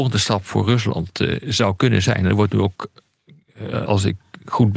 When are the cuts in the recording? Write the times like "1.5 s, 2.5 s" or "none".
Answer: 3.9 s